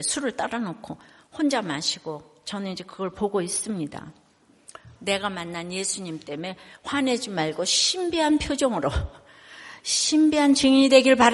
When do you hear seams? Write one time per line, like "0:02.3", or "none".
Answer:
0:05.0